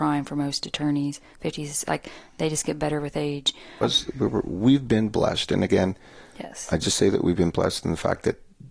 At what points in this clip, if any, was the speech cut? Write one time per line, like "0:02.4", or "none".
0:03.8